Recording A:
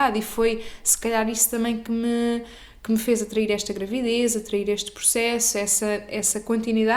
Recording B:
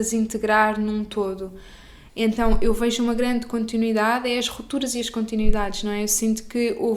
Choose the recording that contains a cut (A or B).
B